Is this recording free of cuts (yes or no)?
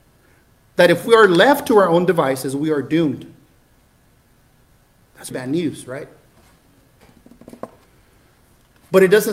no